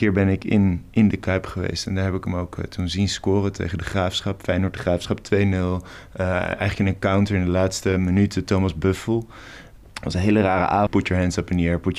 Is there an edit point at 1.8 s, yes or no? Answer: no